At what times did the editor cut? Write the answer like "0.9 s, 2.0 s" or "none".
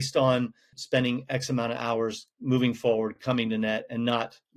none